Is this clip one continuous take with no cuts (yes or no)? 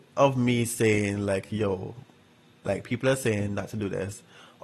yes